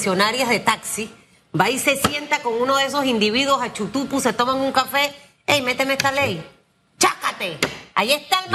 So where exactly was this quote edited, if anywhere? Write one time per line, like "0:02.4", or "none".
none